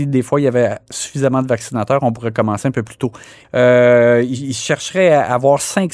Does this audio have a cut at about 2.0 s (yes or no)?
no